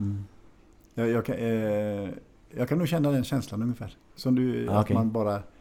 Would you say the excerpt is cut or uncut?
uncut